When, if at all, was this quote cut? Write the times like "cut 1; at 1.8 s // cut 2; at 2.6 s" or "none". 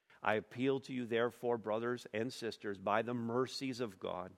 none